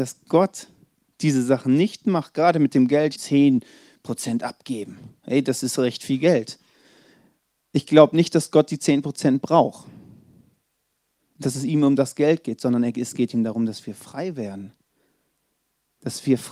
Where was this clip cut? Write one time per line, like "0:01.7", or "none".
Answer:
0:03.2